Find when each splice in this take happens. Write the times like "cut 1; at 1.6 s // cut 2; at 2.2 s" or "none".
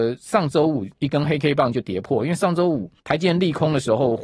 cut 1; at 3.0 s